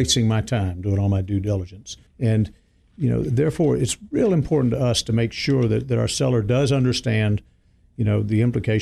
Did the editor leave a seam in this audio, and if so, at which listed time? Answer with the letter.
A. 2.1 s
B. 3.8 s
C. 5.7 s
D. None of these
A